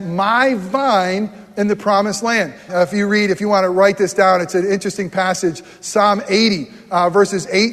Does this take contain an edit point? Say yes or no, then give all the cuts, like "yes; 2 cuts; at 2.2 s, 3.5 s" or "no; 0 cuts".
yes; 1 cut; at 2.7 s